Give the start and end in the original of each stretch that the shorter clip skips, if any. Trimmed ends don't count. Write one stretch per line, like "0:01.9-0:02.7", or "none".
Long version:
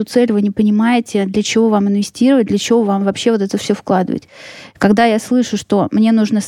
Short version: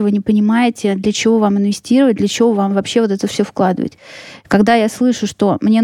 none